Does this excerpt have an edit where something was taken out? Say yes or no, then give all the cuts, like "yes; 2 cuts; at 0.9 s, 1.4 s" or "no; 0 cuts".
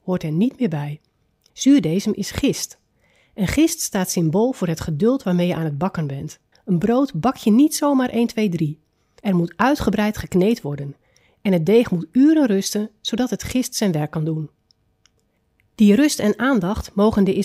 yes; 3 cuts; at 1.5 s, 6.5 s, 9.2 s